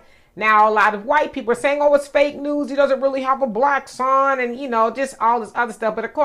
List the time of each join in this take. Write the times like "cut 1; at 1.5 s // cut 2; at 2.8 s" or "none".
none